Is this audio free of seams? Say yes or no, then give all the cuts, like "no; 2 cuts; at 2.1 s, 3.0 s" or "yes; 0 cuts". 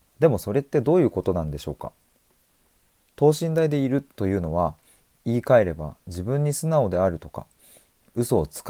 yes; 0 cuts